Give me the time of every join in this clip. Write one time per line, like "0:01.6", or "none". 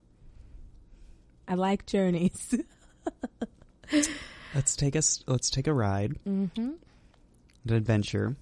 0:01.4